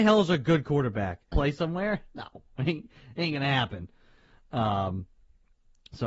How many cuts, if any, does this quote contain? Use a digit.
1